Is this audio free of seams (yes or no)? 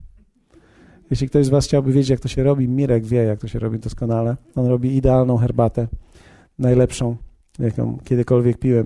yes